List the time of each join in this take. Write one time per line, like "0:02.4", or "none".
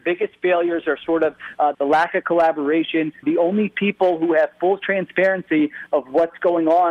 0:01.7
0:03.2